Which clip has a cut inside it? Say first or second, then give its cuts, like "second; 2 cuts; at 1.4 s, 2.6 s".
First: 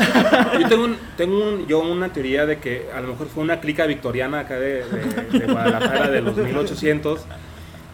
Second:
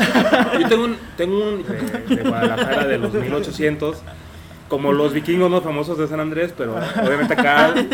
second; 1 cut; at 1.6 s